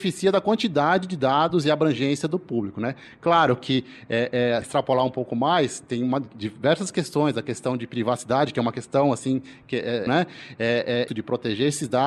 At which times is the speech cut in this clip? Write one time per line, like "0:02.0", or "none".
0:04.6
0:10.1
0:11.1